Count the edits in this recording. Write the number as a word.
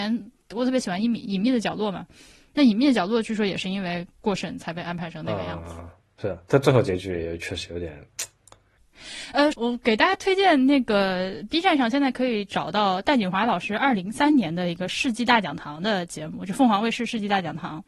two